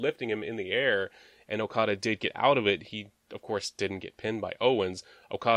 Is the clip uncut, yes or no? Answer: yes